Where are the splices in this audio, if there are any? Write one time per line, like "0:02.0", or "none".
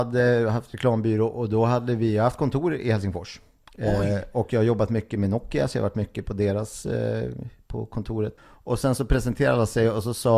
0:08.4